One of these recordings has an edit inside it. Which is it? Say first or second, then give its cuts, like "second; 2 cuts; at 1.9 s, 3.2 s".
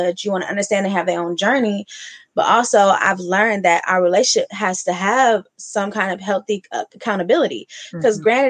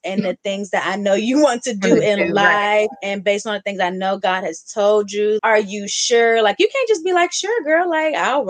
second; 1 cut; at 5.4 s